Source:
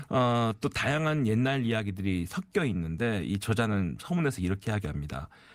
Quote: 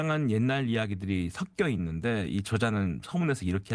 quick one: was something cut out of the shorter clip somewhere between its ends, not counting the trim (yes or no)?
no